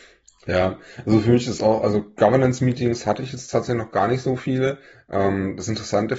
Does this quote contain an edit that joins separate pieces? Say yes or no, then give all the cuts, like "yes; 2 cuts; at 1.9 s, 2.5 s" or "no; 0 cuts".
no; 0 cuts